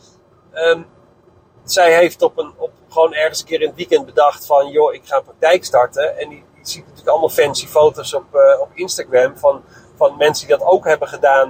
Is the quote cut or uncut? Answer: uncut